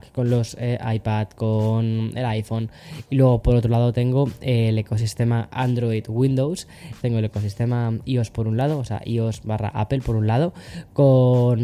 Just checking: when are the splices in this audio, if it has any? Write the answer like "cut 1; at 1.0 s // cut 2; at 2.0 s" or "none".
cut 1; at 7.0 s